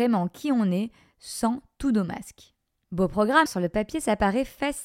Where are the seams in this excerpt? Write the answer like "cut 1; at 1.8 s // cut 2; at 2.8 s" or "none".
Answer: cut 1; at 3.5 s